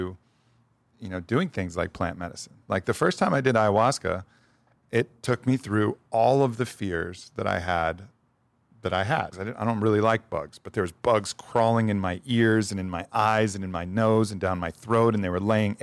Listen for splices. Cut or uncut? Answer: cut